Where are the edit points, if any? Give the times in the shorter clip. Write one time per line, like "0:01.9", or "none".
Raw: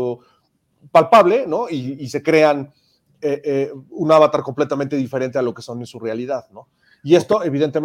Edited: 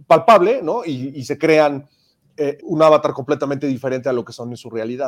0:02.6